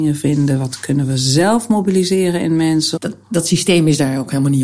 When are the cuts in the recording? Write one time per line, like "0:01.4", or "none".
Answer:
0:03.0